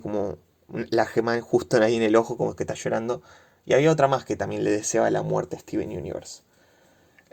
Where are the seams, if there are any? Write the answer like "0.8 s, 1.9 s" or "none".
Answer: none

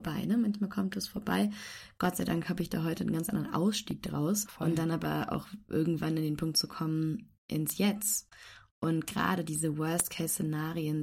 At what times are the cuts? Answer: 4.5 s

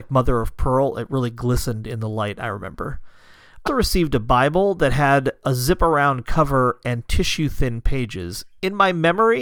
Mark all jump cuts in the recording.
3.7 s

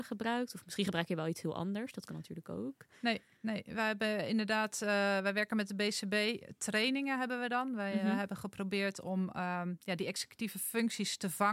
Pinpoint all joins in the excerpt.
none

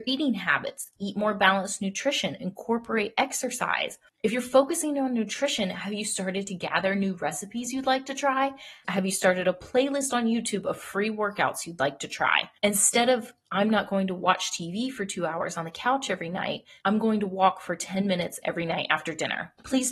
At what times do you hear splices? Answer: 8.8 s, 12.6 s, 16.8 s

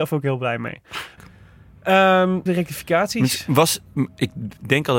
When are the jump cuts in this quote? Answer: 1.2 s, 2.5 s

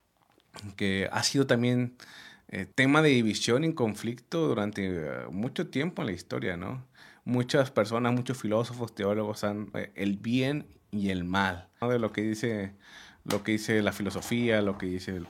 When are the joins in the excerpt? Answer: 2.7 s, 9.7 s, 11.8 s

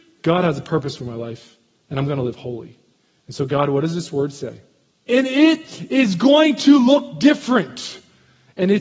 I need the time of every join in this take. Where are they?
5.1 s

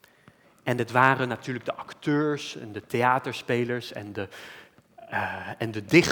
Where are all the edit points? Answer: none

